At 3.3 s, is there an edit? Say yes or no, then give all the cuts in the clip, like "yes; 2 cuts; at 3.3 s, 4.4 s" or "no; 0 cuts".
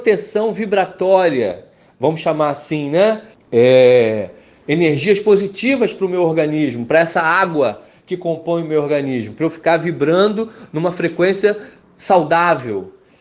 yes; 1 cut; at 3.3 s